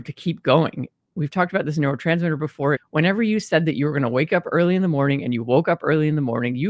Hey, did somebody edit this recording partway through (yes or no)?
yes